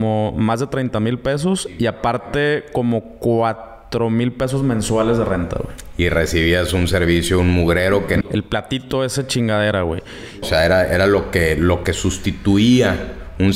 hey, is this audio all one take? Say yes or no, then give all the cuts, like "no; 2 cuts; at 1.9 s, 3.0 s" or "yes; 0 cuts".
no; 2 cuts; at 8.2 s, 10.4 s